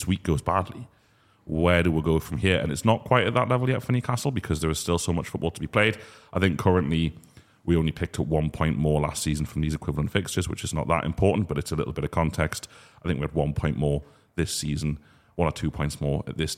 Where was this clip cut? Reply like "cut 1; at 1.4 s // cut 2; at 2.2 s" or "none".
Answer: none